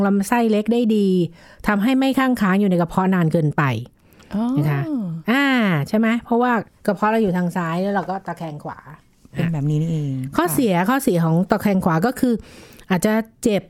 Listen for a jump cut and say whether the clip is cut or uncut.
uncut